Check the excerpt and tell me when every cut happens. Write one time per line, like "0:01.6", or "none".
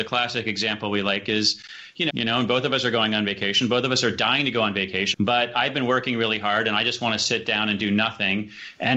0:02.1
0:05.1